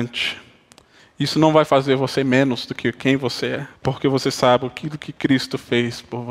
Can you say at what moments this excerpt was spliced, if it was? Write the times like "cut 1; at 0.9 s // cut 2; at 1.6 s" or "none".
cut 1; at 1.0 s // cut 2; at 3.8 s